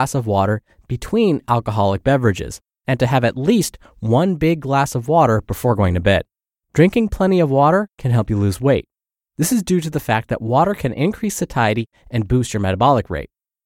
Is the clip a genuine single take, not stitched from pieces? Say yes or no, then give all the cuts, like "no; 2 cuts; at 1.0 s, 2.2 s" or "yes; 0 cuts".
no; 1 cut; at 6.6 s